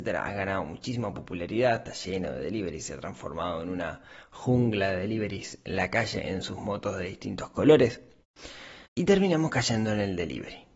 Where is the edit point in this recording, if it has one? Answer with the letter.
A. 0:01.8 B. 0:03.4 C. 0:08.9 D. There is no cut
C